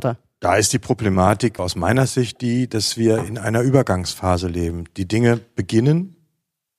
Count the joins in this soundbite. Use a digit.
1